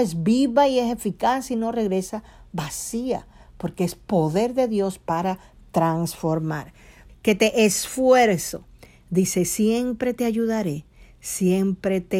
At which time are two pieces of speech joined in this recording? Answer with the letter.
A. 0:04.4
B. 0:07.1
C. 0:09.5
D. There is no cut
B